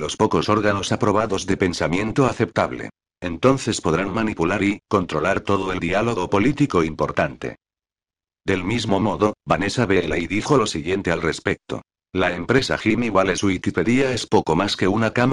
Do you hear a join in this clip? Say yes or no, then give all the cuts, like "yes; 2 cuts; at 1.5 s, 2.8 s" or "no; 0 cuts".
yes; 1 cut; at 4.8 s